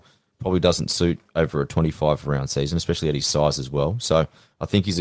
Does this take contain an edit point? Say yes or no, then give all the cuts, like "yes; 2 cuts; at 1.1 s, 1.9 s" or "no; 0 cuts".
no; 0 cuts